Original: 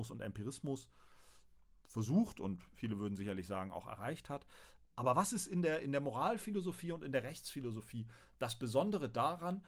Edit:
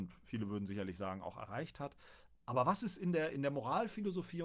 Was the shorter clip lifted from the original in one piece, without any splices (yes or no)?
yes